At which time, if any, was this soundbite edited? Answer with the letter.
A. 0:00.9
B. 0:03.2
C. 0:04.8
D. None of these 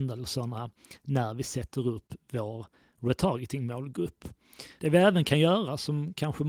C